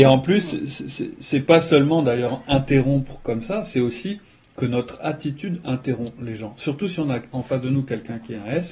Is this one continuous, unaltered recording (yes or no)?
yes